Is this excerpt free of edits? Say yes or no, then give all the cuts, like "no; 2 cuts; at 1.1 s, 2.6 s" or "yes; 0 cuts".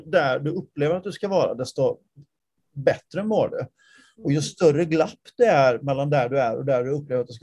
yes; 0 cuts